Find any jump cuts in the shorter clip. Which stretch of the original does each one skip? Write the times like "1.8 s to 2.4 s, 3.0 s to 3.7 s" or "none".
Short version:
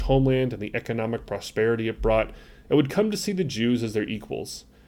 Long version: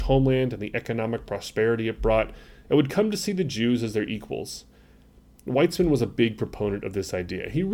none

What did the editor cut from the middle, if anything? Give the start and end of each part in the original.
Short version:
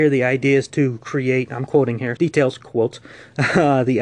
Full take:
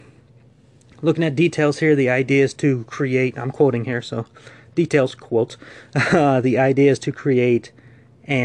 4.0 s to 4.7 s

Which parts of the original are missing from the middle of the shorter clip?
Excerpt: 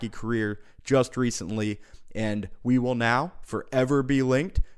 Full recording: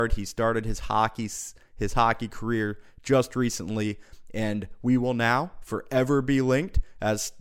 none

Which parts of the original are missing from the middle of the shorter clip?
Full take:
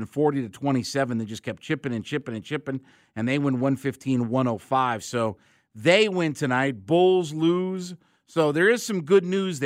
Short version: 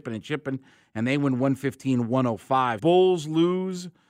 5.0 s to 6.9 s

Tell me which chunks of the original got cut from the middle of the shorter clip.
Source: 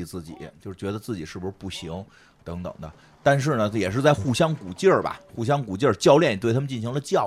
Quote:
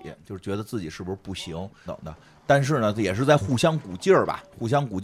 2.2 s to 2.6 s

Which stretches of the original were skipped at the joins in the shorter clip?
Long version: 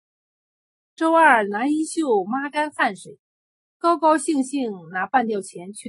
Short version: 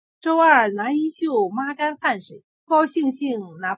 3.4 s to 4.0 s

